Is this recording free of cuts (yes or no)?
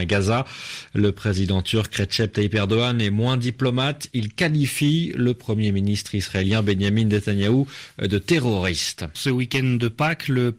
no